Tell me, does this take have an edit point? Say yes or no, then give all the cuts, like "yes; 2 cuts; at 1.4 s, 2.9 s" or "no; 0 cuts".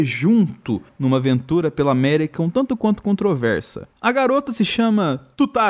no; 0 cuts